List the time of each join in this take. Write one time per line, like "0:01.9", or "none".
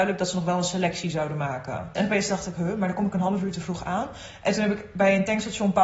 0:01.9